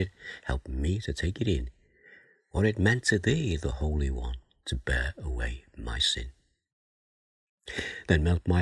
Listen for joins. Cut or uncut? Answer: uncut